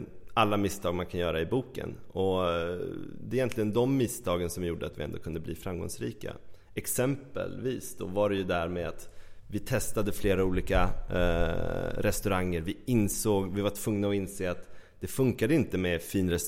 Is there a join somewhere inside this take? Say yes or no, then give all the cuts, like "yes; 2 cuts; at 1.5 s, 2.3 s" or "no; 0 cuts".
no; 0 cuts